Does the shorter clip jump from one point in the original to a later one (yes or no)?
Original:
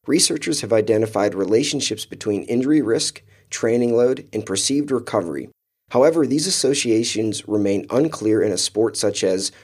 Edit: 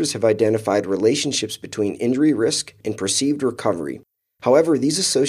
yes